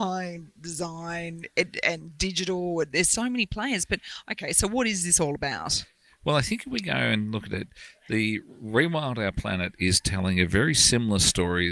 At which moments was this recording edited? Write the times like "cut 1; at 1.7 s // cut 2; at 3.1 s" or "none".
cut 1; at 3.1 s

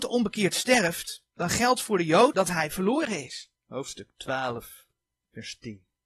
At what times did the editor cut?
cut 1; at 2.3 s // cut 2; at 3.6 s

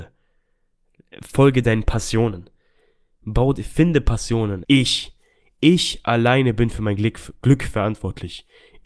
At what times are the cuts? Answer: cut 1; at 4.6 s

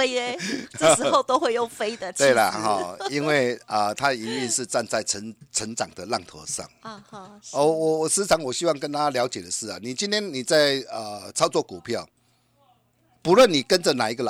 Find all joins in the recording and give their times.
none

